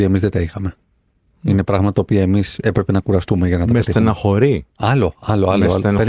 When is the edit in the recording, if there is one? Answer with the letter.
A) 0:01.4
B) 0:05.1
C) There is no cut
C